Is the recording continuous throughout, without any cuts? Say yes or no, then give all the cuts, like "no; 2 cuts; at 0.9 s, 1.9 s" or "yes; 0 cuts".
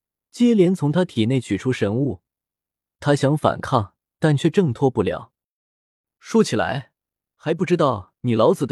no; 1 cut; at 7.3 s